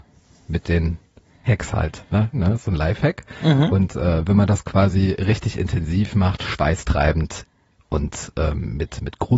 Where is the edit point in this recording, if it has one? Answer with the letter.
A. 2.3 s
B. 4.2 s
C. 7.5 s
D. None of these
A